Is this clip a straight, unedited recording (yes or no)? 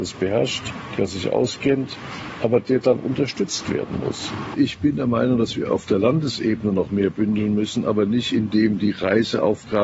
yes